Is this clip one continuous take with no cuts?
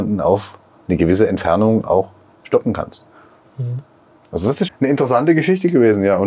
no; 1 cut; at 4.7 s

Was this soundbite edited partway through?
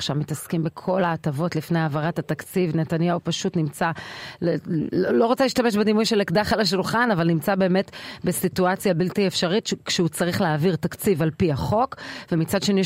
no; 0 cuts

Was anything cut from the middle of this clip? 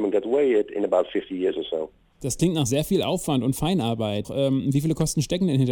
yes; 1 cut; at 4.2 s

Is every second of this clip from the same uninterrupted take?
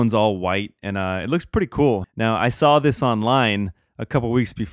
no; 1 cut; at 2.0 s

